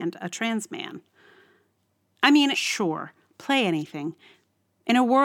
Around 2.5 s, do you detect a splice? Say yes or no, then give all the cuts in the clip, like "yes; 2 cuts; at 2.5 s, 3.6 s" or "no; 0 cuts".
yes; 1 cut; at 2.5 s